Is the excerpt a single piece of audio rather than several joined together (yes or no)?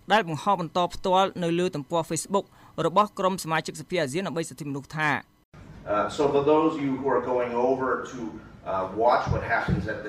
yes